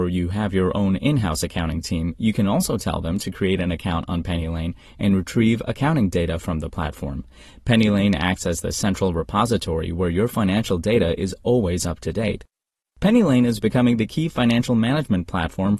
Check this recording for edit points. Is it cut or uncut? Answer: uncut